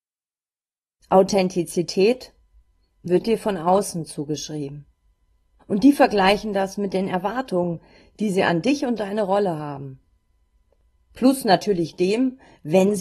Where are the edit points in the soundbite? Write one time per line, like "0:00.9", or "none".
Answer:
0:05.6